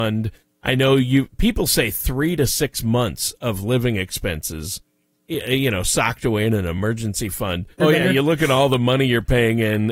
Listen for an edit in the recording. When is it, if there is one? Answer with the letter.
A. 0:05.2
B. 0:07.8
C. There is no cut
B